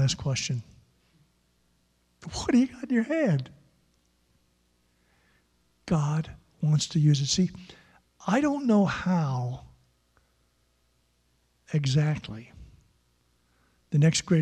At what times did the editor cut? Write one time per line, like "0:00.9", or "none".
none